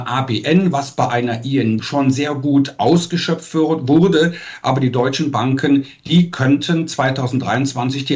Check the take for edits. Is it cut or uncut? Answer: cut